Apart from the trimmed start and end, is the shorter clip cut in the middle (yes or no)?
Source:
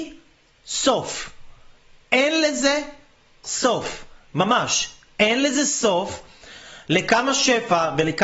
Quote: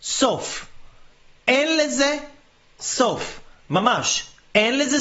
no